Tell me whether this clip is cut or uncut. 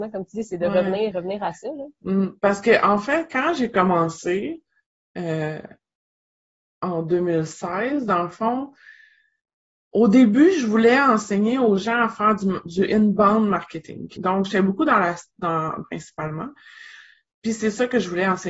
cut